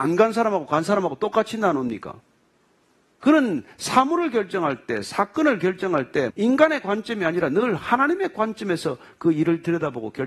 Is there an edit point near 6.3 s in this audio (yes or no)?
yes